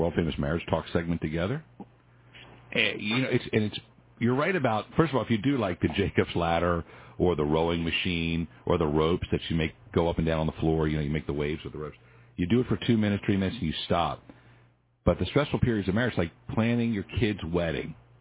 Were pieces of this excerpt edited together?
no; 0 cuts

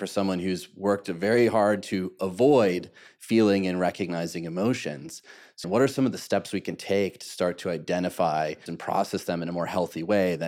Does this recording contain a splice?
yes; 2 cuts; at 5.6 s, 8.7 s

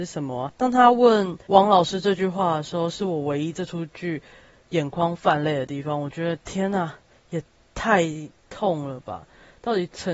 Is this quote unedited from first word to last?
yes; 0 cuts

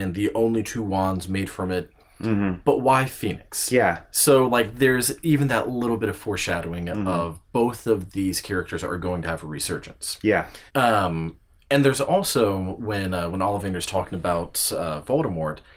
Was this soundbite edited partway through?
yes; 1 cut; at 10.7 s

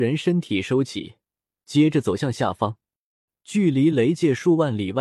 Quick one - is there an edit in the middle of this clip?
no; 0 cuts

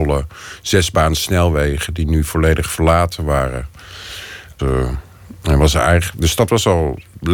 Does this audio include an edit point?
yes; 1 cut; at 4.6 s

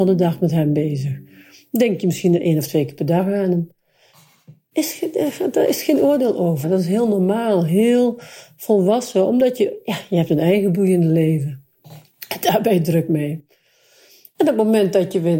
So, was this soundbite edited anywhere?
yes; 1 cut; at 6.6 s

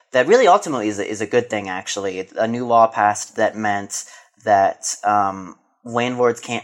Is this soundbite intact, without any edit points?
yes; 0 cuts

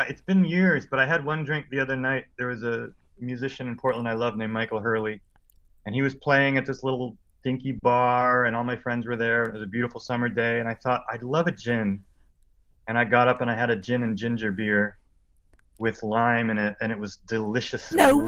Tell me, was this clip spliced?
no; 0 cuts

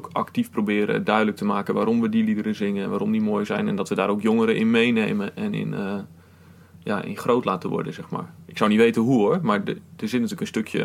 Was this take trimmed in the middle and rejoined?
no; 0 cuts

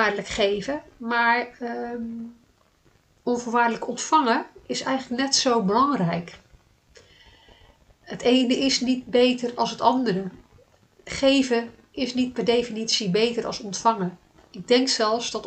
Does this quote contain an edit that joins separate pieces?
no; 0 cuts

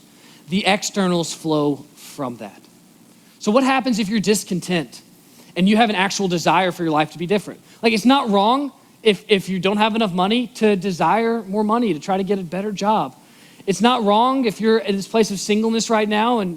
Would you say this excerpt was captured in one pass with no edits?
yes; 0 cuts

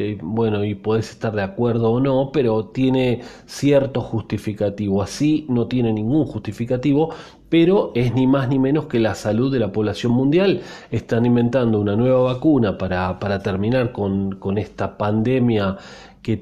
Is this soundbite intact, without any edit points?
yes; 0 cuts

